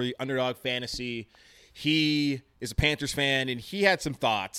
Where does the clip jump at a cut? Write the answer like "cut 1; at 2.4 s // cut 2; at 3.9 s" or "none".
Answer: none